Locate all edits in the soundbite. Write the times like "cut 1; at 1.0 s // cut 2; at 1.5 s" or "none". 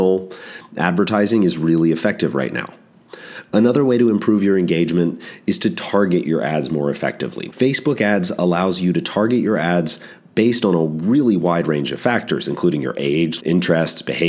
cut 1; at 7.5 s // cut 2; at 13.4 s